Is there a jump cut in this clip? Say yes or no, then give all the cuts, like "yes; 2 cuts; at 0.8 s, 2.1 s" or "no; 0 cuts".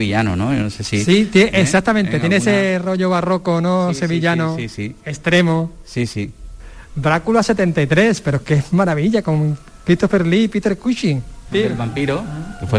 yes; 1 cut; at 11.5 s